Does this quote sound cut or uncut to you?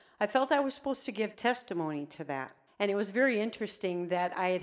cut